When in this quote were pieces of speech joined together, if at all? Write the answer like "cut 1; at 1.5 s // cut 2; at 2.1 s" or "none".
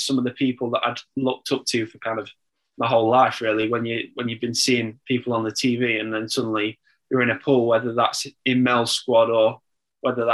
none